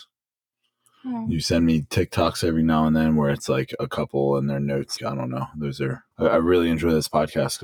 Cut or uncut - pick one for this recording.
cut